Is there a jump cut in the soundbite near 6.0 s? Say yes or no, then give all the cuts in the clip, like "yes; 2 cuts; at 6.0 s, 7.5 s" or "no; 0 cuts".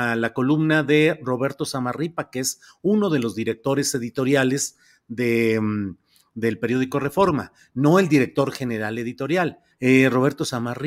no; 1 cut; at 9.7 s